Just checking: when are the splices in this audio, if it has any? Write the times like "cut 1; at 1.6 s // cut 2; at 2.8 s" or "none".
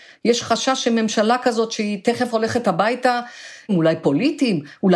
cut 1; at 3.7 s